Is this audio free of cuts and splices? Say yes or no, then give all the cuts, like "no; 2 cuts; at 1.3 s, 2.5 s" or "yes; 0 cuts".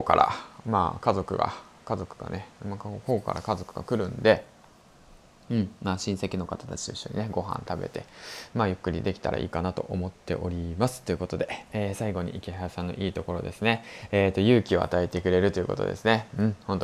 yes; 0 cuts